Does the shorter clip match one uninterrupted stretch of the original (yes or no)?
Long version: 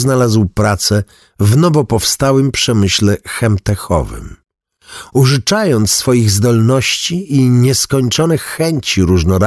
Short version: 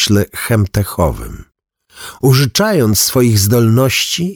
yes